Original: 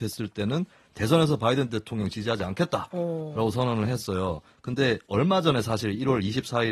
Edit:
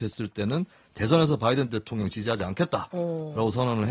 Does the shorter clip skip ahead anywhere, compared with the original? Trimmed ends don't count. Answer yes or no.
no